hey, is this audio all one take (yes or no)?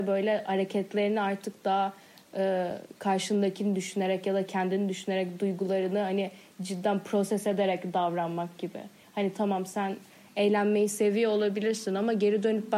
yes